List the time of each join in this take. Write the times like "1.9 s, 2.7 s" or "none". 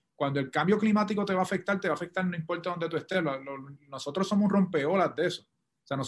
none